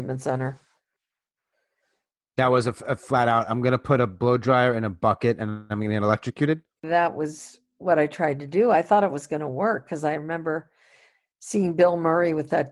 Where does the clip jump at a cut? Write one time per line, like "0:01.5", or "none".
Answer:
none